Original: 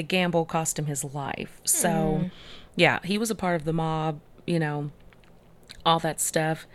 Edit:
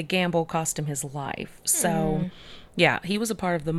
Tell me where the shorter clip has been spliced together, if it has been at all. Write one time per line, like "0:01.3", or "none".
none